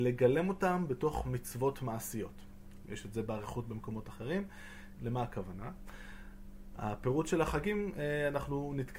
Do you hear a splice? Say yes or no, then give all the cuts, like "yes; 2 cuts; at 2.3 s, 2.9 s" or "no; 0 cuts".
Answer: yes; 2 cuts; at 2.8 s, 4.9 s